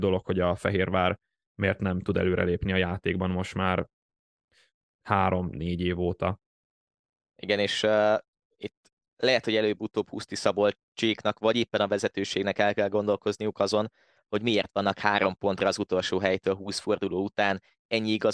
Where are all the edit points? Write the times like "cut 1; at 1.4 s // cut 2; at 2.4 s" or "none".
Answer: none